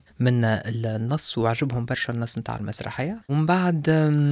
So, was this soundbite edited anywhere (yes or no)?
yes